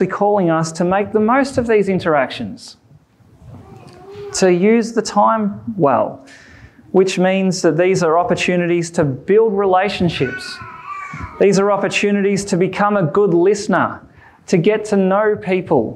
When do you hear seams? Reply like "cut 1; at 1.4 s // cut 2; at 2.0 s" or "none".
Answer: none